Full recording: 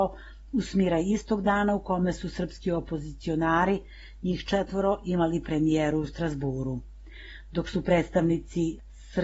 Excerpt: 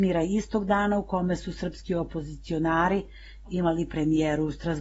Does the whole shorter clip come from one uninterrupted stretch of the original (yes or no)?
no